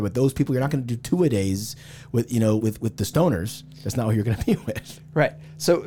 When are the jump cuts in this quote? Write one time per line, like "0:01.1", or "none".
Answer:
0:02.6